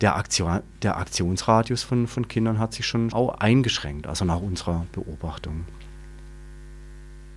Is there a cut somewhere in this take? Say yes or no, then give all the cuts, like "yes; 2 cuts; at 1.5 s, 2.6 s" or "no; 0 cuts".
yes; 1 cut; at 3.1 s